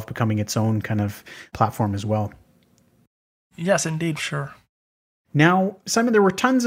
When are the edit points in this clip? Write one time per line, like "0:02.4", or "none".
0:04.2